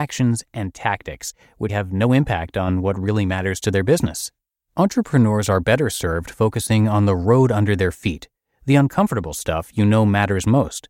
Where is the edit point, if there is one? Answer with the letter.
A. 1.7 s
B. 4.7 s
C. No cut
A